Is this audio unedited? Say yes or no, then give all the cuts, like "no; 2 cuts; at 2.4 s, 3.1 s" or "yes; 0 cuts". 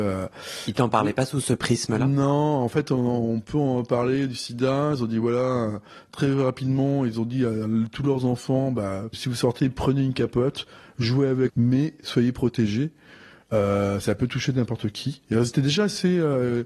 no; 2 cuts; at 9.1 s, 11.5 s